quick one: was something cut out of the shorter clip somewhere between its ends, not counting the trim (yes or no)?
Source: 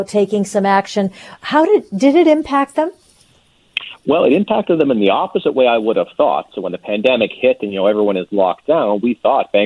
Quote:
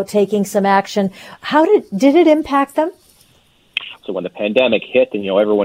yes